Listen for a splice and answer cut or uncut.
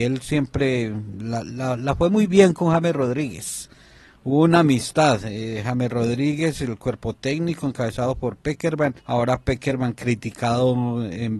cut